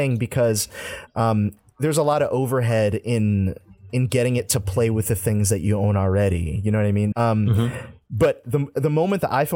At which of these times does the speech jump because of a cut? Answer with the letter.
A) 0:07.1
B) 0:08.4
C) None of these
A